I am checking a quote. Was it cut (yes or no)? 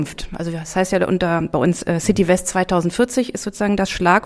no